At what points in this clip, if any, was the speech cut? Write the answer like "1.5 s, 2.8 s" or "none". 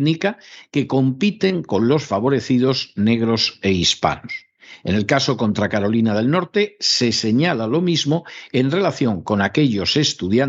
none

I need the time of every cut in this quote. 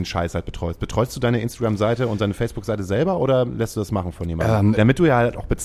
4.7 s

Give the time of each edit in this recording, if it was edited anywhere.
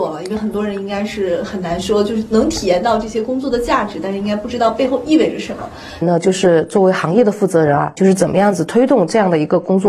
6.0 s, 8.0 s

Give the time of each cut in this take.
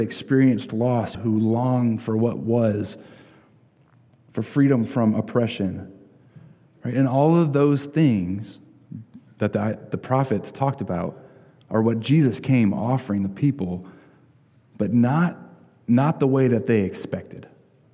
1.1 s

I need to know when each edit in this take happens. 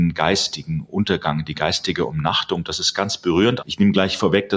3.6 s

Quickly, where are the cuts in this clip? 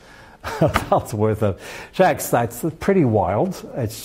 none

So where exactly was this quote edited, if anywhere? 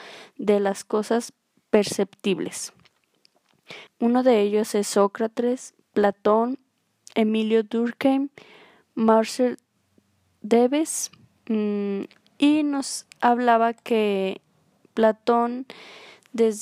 3.9 s

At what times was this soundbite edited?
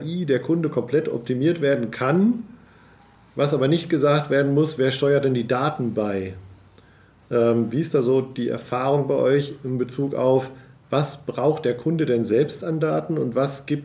none

